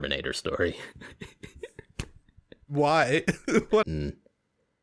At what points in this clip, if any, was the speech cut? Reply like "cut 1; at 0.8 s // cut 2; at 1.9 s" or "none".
cut 1; at 3.8 s